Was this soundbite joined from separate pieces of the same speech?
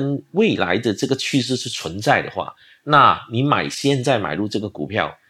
no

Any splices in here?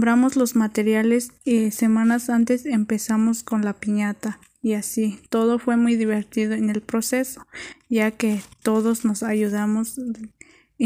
no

